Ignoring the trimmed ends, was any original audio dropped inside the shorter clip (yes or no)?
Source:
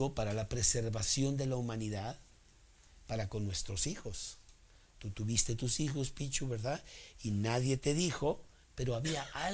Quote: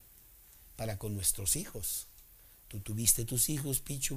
no